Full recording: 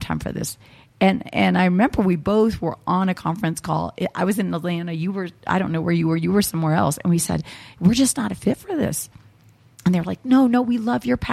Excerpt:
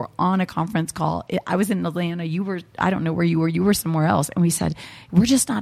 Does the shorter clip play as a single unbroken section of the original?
yes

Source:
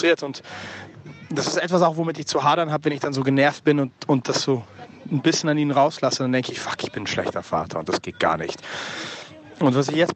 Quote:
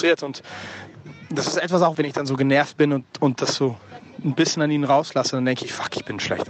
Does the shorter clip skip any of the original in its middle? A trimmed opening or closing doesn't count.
yes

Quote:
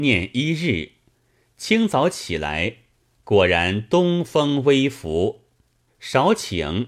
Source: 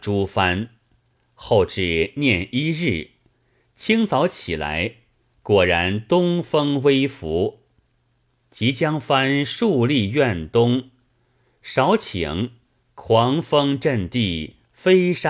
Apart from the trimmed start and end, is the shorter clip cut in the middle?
yes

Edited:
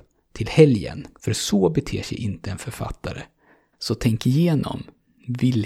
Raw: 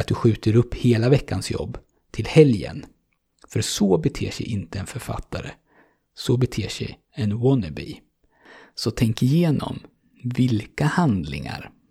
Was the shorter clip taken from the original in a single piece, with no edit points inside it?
no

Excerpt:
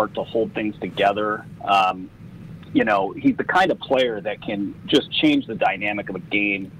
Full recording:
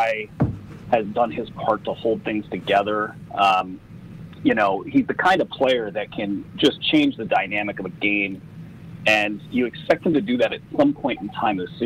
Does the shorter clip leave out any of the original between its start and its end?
no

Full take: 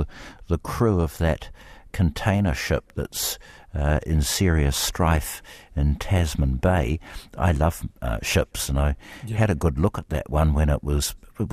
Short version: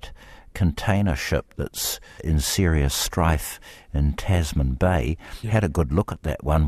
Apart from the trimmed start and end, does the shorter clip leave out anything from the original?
yes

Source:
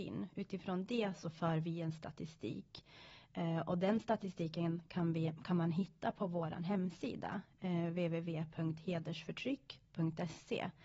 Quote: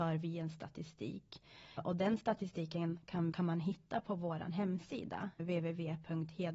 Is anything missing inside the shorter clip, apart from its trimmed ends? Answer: yes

